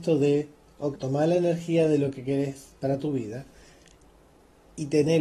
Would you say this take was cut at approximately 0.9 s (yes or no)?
yes